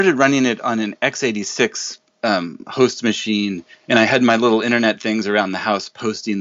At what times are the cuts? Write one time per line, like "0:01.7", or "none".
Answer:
none